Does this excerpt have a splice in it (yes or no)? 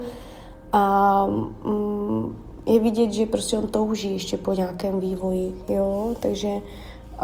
no